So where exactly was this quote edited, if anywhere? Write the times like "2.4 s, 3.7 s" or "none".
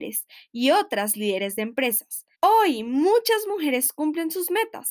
2.3 s